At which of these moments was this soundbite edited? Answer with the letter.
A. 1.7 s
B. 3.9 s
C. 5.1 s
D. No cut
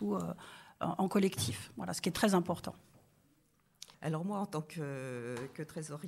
B